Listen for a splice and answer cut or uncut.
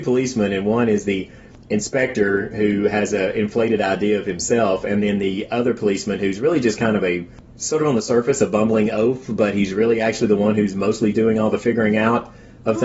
uncut